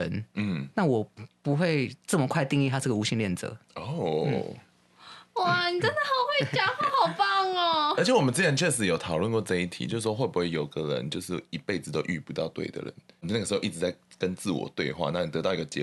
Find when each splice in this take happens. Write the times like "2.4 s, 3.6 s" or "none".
2.0 s